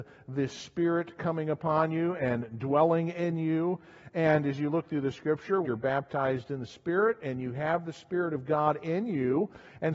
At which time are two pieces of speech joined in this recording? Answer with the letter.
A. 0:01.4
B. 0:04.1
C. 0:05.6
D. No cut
C